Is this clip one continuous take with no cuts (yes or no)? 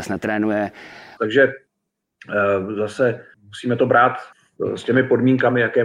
no